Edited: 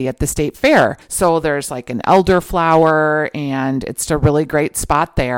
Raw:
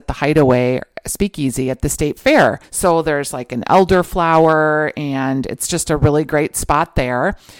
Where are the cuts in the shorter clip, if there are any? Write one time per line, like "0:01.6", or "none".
0:04.1